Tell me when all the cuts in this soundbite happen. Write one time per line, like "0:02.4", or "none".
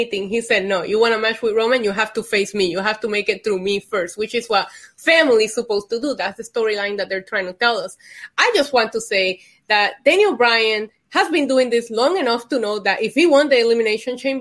none